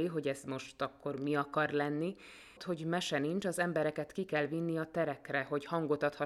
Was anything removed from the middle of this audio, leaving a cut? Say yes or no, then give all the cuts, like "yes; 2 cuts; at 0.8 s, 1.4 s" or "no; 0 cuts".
yes; 1 cut; at 2.6 s